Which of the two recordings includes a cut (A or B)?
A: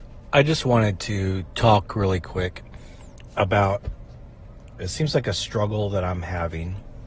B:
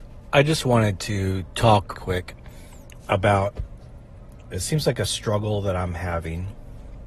B